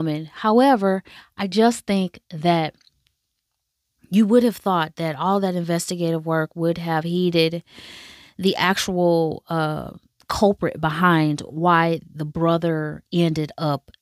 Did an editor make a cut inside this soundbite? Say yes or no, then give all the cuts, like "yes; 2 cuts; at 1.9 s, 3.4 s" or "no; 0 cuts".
no; 0 cuts